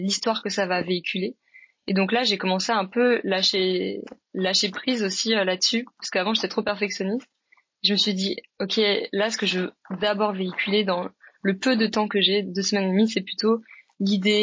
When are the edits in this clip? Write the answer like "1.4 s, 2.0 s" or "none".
none